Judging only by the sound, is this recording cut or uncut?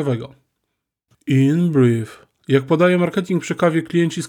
cut